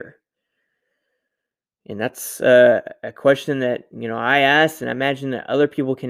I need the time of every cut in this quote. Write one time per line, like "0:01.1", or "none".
none